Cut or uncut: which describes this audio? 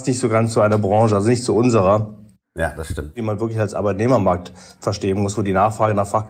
uncut